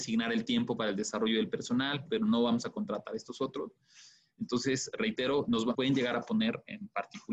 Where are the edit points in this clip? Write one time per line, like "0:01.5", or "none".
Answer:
0:02.1
0:05.7